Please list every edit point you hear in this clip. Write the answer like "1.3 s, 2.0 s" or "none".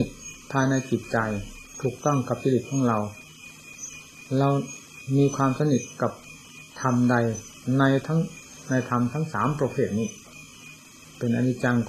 6.7 s